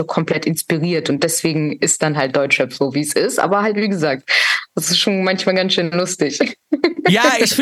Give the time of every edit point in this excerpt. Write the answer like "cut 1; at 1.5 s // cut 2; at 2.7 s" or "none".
none